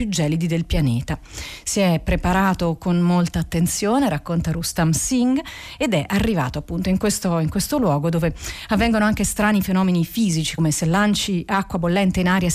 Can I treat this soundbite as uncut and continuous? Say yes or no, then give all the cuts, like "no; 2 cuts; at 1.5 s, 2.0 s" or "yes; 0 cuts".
no; 1 cut; at 10.6 s